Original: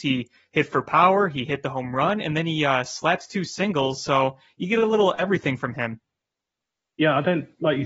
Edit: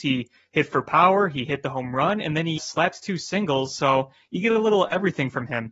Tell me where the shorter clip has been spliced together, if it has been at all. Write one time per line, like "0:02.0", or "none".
0:02.6